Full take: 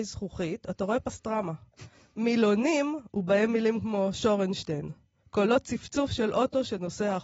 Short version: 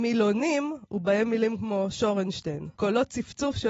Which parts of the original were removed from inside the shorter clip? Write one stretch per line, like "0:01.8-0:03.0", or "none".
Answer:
0:05.0-0:05.3